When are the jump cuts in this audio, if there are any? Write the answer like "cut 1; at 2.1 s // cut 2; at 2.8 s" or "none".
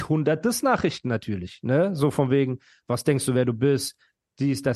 none

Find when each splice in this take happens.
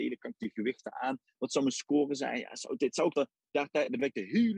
cut 1; at 3.1 s

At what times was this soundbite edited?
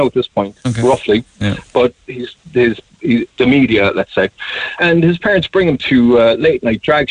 cut 1; at 3.3 s // cut 2; at 4.8 s

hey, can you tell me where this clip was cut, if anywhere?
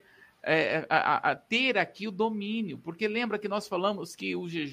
none

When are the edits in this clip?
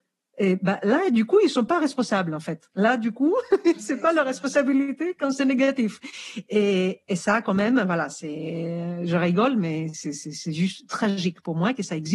none

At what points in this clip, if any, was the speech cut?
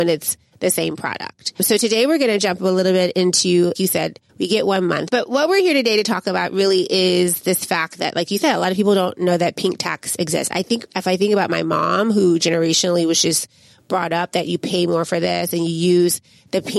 cut 1; at 3.7 s // cut 2; at 5.1 s

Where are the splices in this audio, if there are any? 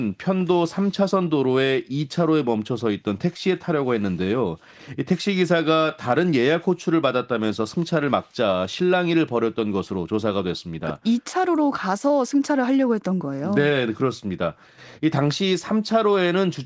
none

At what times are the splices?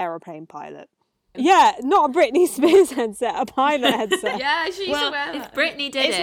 cut 1; at 1.3 s

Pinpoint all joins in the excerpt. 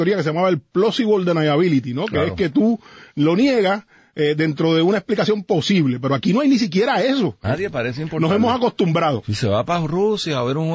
cut 1; at 7.4 s

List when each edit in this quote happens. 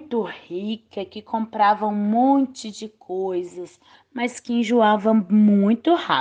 cut 1; at 3.9 s

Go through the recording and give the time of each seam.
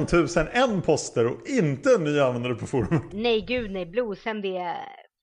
none

